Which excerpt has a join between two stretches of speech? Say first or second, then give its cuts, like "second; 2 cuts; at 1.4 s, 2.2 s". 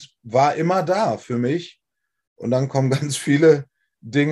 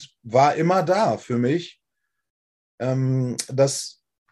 first; 1 cut; at 2.3 s